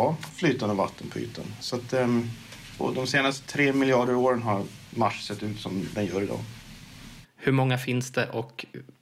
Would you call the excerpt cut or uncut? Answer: cut